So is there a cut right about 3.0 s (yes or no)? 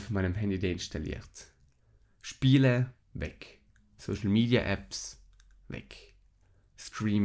yes